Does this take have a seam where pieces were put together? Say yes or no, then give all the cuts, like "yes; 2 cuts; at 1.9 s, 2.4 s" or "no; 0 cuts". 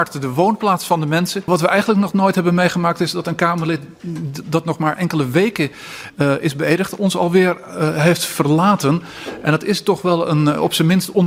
no; 0 cuts